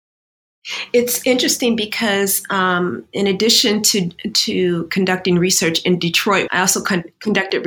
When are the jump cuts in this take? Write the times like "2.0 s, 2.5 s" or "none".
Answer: 6.5 s